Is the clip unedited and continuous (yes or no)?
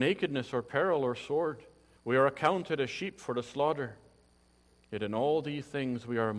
no